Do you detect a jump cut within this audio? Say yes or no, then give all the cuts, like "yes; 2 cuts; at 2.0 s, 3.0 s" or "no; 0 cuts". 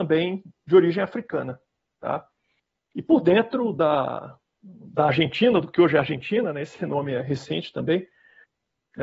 no; 0 cuts